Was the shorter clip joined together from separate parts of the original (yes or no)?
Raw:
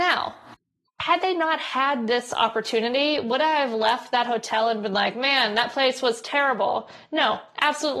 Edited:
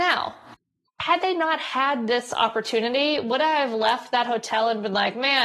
no